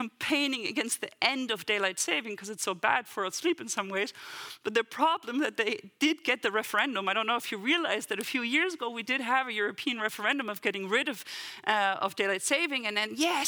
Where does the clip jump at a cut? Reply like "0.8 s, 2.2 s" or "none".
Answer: none